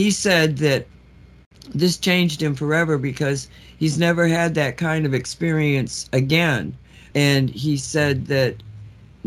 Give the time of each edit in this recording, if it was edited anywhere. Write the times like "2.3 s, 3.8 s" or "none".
7.1 s